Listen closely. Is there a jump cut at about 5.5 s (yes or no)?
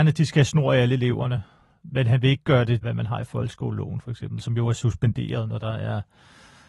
no